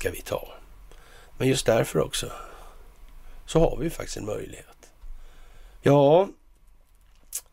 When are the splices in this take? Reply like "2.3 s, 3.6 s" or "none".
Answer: 1.3 s, 5.8 s